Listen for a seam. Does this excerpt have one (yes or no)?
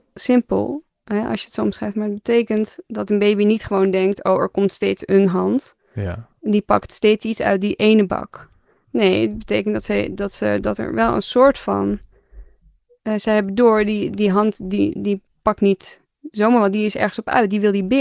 no